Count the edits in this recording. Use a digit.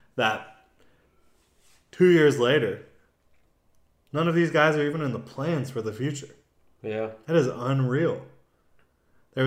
0